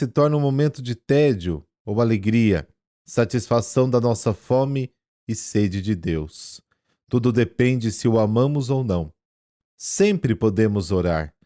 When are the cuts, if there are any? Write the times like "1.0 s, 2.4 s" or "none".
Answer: 9.6 s

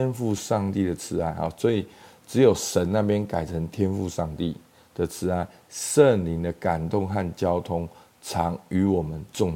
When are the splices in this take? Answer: none

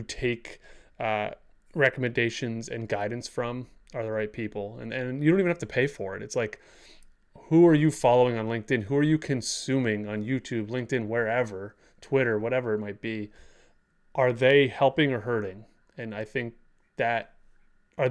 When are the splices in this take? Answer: none

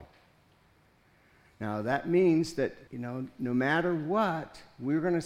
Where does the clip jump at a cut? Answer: 1.4 s, 2.9 s

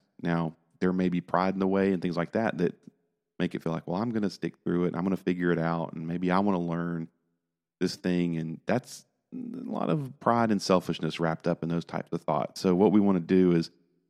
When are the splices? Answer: none

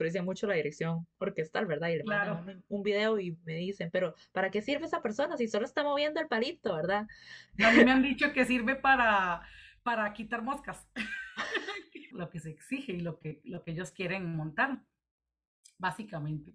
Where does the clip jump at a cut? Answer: 12.1 s

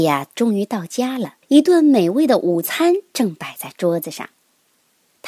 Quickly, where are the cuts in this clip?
1.4 s

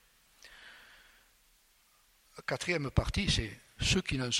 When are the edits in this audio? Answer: none

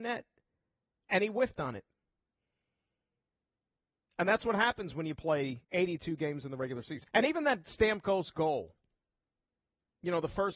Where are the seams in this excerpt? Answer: 4.1 s, 5.6 s, 7.0 s

